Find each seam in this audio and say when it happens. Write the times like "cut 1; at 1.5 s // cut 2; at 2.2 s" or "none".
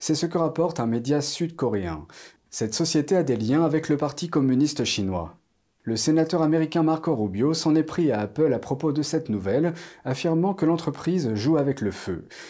cut 1; at 2.4 s